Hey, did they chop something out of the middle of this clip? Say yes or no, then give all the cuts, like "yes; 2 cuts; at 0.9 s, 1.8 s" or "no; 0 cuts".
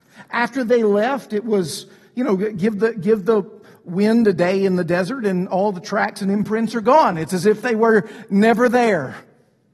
no; 0 cuts